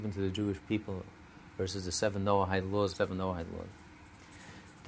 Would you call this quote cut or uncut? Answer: cut